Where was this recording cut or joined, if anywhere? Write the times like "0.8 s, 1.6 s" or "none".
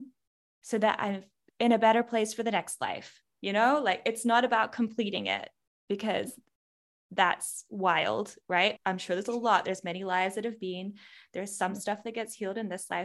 8.8 s